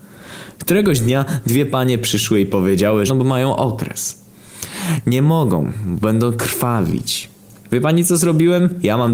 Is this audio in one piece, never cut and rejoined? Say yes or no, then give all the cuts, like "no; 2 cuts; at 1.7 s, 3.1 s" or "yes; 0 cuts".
no; 1 cut; at 3.1 s